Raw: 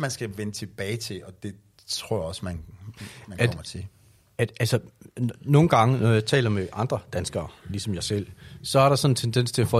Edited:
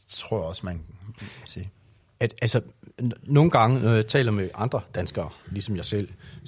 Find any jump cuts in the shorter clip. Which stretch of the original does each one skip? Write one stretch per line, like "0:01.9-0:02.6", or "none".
0:03.2-0:03.6